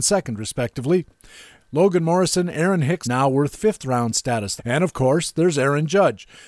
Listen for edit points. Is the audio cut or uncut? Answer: cut